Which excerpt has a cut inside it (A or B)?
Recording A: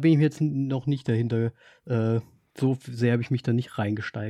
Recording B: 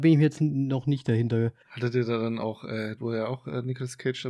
B